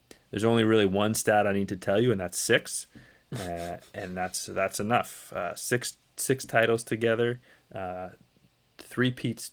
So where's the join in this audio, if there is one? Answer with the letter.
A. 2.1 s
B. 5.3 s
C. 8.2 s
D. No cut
D